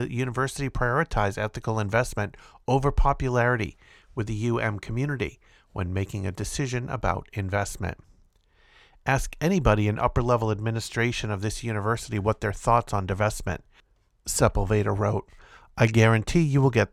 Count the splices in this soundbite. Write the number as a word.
zero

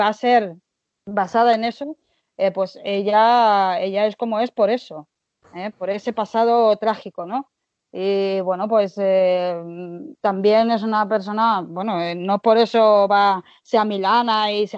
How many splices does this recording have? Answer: zero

